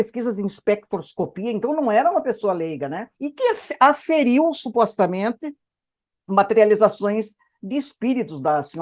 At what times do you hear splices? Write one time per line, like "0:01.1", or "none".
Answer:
0:03.1